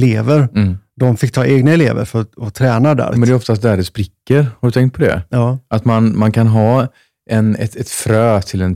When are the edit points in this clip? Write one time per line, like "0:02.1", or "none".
0:03.1